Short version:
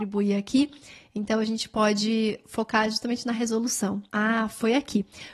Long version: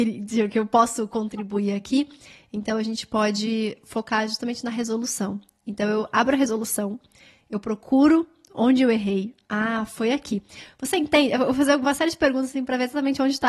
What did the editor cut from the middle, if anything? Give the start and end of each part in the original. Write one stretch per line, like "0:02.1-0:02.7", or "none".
0:05.5-0:09.5